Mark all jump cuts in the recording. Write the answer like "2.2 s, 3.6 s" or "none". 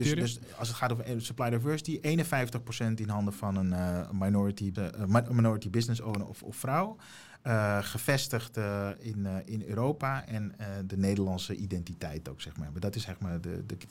4.8 s